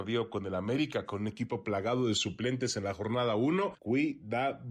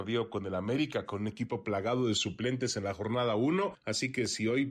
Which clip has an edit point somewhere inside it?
first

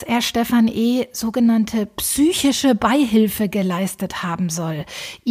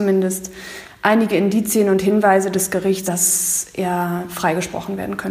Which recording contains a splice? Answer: second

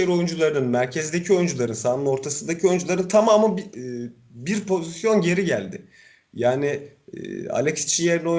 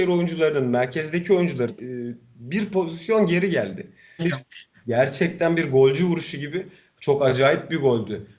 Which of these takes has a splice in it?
second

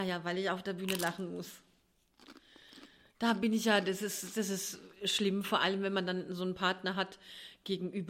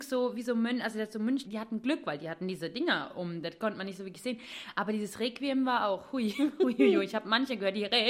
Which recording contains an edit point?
second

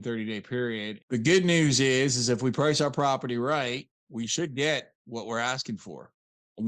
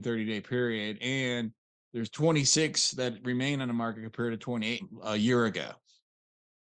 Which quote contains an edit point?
first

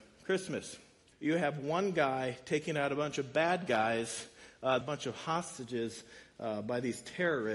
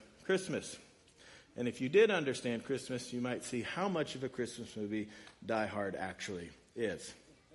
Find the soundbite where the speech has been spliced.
first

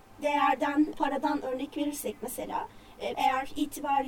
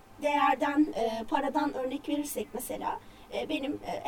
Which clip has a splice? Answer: first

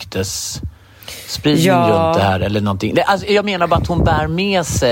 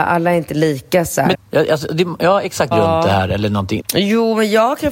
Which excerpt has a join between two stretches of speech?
second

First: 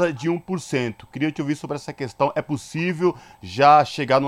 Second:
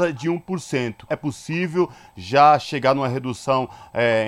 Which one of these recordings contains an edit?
second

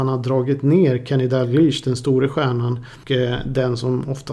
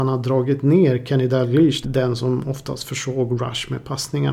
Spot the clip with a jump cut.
second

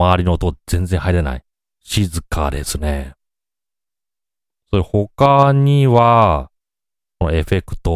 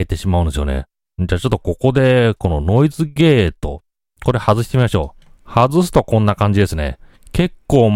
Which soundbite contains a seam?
second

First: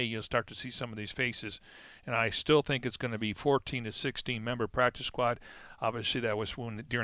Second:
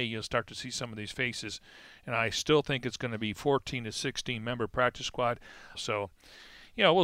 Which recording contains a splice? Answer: second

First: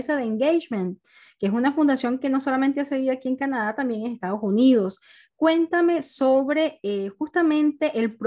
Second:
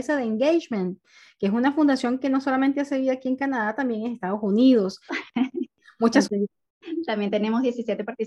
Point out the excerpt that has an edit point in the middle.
second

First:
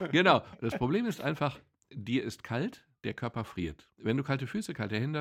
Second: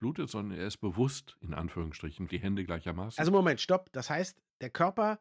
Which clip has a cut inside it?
second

